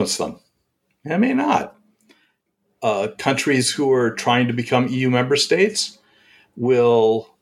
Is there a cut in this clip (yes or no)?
no